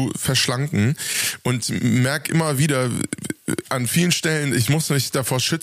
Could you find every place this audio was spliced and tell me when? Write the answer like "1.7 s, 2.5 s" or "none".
none

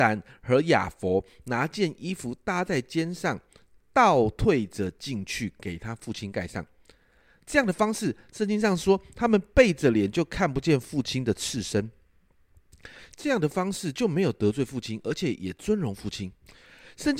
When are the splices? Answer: 13.1 s

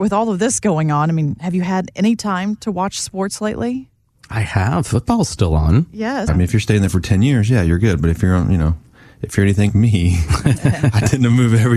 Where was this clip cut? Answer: 6.3 s, 9.7 s

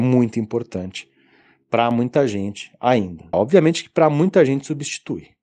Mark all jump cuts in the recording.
3.3 s

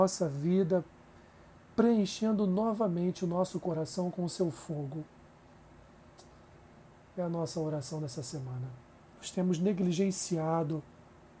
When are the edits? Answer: 9.0 s

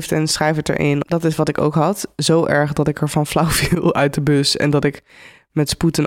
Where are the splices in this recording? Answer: 1.0 s

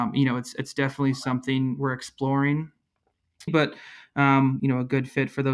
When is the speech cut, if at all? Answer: 3.5 s, 4.6 s

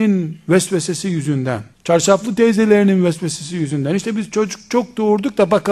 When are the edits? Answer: 1.7 s

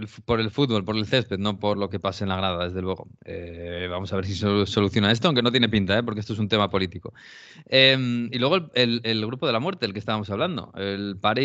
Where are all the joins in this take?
none

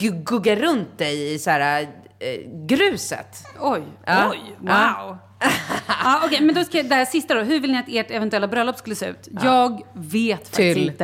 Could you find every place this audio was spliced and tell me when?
none

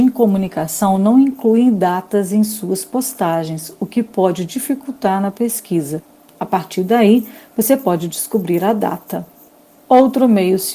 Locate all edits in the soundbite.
6.3 s

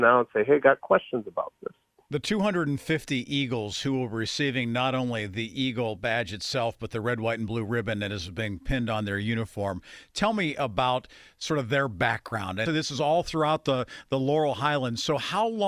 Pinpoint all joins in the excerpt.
12.7 s

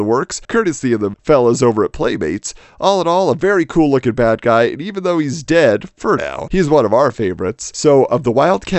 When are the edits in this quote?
none

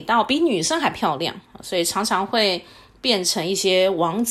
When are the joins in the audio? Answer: none

